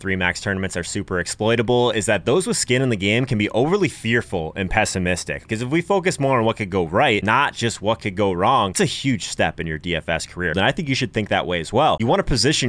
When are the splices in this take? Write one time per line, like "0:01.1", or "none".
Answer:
0:05.5
0:10.5

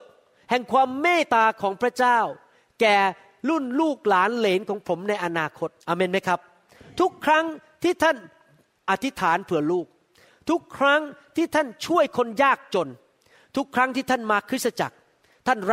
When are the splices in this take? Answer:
0:01.2
0:05.8

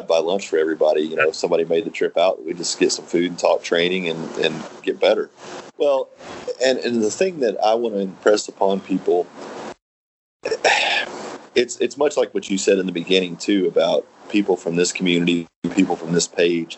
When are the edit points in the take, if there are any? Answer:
0:05.7

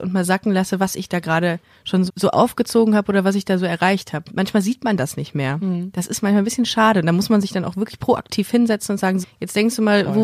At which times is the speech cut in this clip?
0:02.1
0:09.2

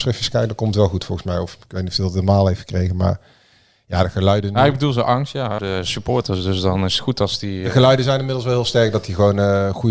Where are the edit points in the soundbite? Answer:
0:05.6

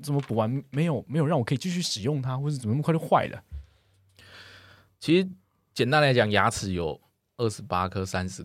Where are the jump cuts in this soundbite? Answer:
none

